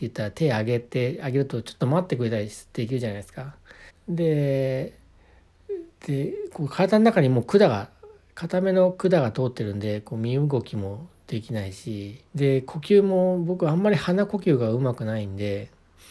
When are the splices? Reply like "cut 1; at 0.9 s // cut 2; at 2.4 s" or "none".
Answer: cut 1; at 3.9 s // cut 2; at 12.3 s